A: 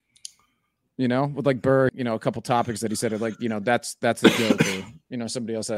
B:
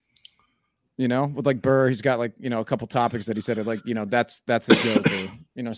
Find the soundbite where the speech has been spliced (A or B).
A